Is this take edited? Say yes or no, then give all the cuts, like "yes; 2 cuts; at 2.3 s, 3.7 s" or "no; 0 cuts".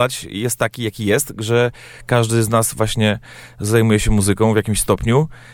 no; 0 cuts